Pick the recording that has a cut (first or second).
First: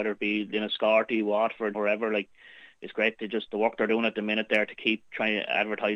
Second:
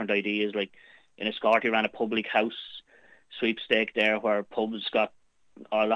first